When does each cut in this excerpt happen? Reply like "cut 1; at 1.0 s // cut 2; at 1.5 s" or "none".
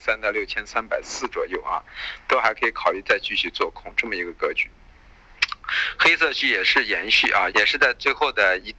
cut 1; at 7.5 s

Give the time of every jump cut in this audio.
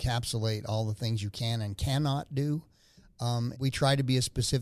cut 1; at 3.5 s

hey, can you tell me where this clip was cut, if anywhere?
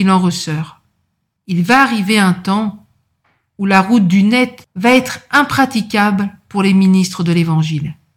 cut 1; at 1.4 s // cut 2; at 4.6 s

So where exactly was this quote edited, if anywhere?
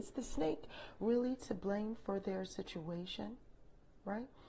none

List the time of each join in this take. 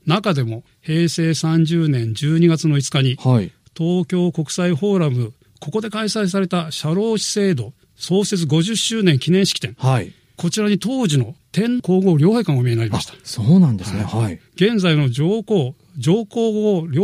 cut 1; at 11.8 s

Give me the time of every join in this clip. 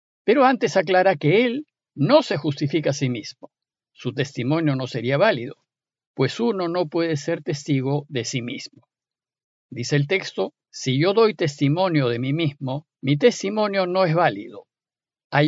cut 1; at 3.8 s // cut 2; at 10.6 s // cut 3; at 12.9 s

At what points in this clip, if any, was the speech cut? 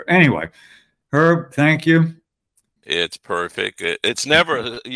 cut 1; at 2.8 s

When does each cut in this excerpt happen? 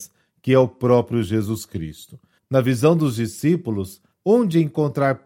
cut 1; at 2.4 s // cut 2; at 4.1 s

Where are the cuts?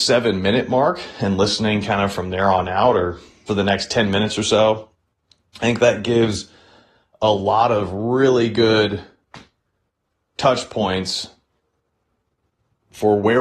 cut 1; at 3.5 s

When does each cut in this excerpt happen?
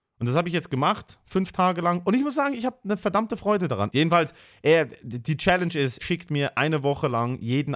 cut 1; at 3.9 s // cut 2; at 6.0 s

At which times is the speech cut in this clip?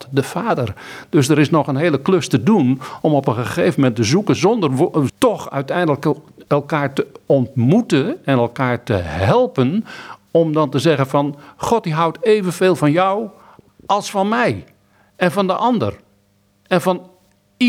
cut 1; at 5.1 s

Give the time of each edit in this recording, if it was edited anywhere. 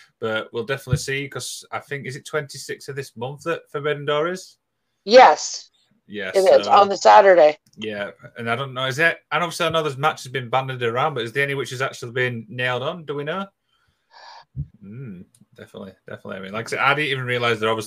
cut 1; at 7.7 s // cut 2; at 14.7 s

